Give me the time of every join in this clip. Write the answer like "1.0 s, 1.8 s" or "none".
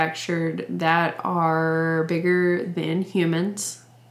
none

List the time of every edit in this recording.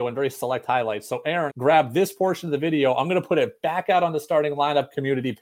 1.5 s

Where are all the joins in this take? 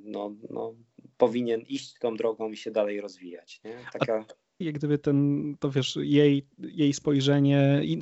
4.6 s

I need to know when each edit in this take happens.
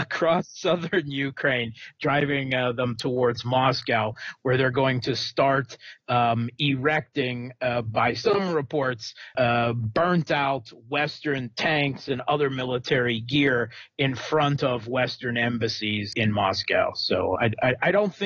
9.3 s, 16.1 s, 17.4 s

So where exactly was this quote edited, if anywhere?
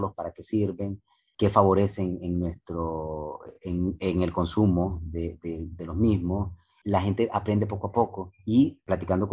none

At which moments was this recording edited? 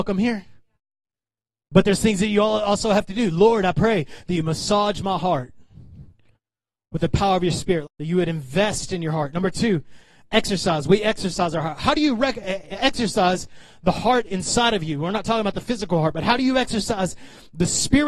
7.8 s

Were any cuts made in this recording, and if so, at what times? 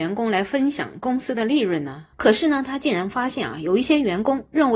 2.1 s

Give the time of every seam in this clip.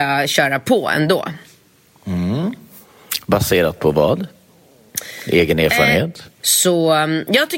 6.4 s

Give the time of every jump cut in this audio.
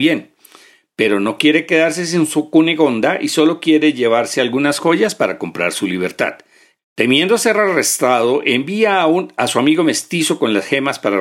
6.8 s

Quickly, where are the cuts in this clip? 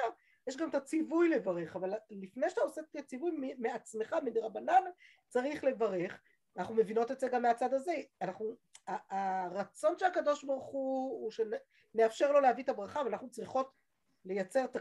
none

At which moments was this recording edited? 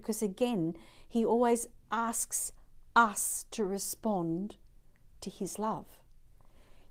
none

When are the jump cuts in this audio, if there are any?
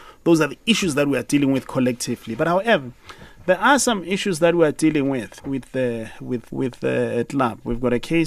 5.4 s, 6.5 s

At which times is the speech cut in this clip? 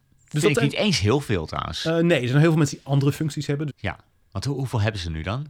3.7 s

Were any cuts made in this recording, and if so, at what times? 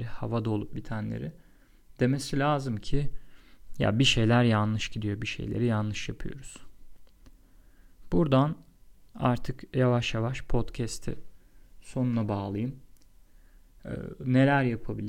none

